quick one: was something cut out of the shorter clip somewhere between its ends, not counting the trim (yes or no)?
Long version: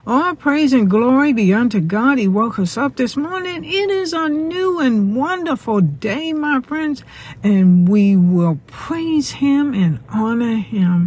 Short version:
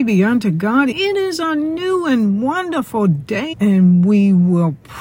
yes